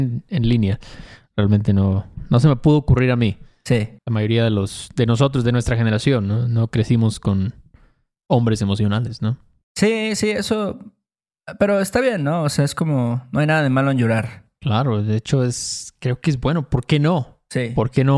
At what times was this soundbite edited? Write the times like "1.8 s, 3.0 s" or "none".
4.0 s

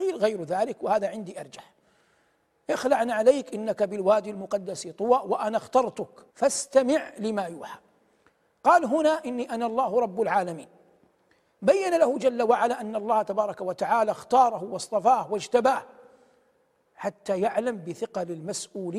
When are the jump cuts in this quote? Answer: 6.3 s

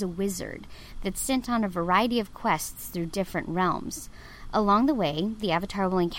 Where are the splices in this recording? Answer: none

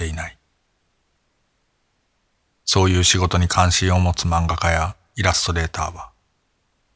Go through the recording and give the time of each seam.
none

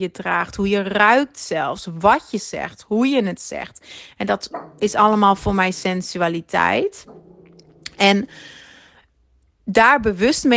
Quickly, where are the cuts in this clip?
none

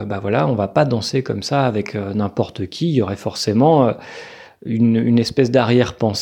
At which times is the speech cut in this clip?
none

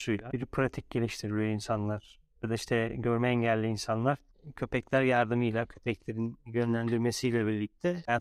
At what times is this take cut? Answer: none

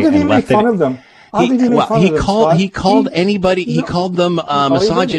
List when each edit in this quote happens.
none

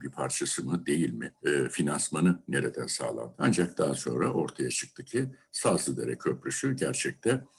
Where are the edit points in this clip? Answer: 1.4 s, 3.3 s

